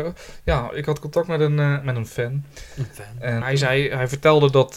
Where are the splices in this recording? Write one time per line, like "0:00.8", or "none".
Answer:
0:03.4